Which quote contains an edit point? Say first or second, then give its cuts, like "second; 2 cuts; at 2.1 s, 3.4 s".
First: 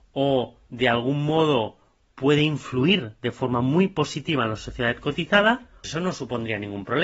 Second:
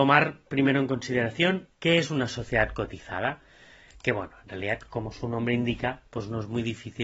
first; 1 cut; at 5.8 s